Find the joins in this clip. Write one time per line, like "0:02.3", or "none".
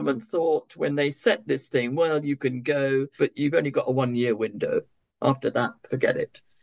0:03.2